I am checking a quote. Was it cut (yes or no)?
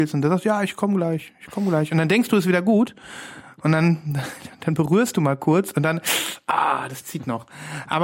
no